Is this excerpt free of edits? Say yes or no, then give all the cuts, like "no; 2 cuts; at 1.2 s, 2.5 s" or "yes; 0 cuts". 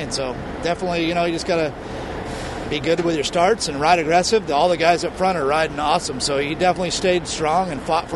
yes; 0 cuts